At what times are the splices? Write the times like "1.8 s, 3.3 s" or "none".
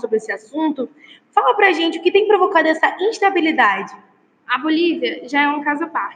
4.4 s